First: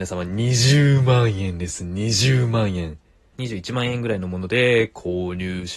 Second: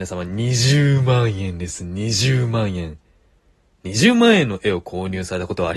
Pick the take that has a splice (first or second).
first